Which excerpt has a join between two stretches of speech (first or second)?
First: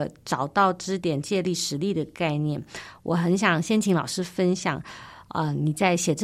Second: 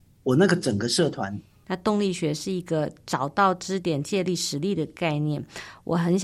second